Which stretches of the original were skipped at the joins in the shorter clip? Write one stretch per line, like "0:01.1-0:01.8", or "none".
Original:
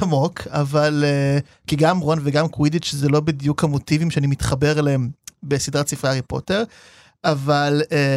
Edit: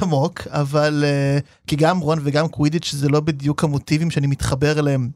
none